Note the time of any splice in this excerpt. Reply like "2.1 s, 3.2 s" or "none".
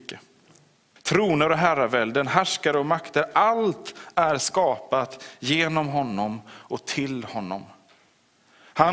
1.0 s